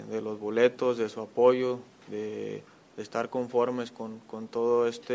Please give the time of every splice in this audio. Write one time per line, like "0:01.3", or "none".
none